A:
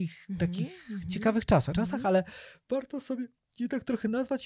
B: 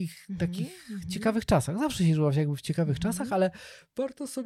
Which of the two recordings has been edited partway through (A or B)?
A